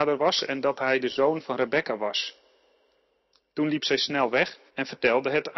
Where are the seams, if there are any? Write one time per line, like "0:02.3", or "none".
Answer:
0:04.7

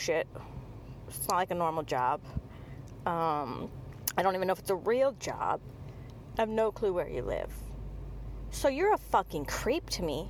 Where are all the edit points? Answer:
0:06.3

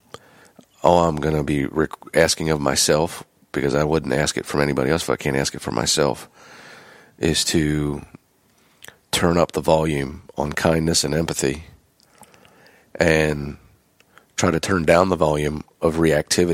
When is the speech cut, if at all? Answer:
none

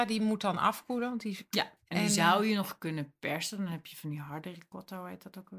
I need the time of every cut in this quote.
0:01.8

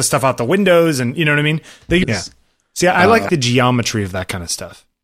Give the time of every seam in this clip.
0:02.0
0:03.3

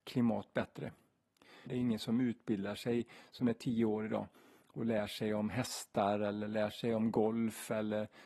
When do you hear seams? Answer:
0:01.7

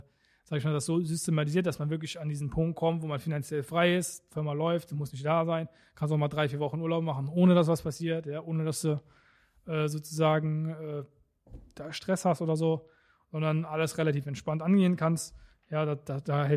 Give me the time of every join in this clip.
none

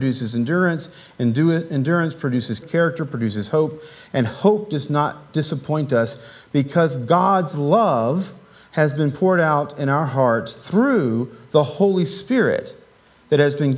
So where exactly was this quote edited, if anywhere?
0:02.6

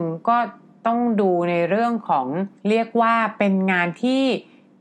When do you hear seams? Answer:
0:02.6

